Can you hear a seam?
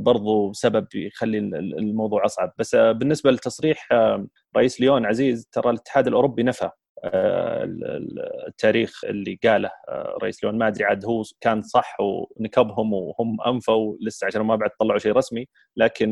yes; 1 cut; at 9.0 s

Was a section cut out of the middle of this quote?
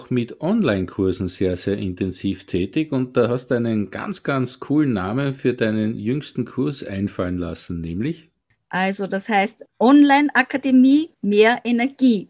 yes; 1 cut; at 11.1 s

